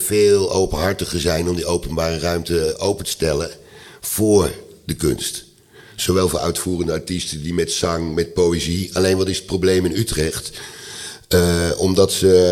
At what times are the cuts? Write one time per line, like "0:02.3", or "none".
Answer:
none